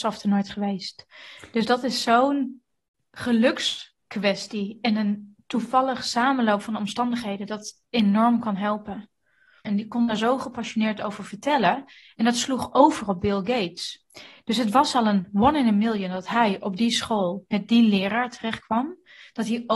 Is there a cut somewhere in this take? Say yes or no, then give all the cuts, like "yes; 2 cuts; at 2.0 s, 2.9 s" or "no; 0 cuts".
yes; 1 cut; at 9.6 s